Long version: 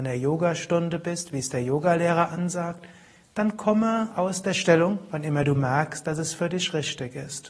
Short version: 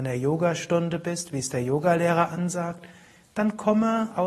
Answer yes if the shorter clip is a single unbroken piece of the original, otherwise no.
yes